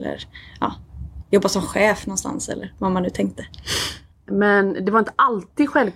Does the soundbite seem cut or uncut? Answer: cut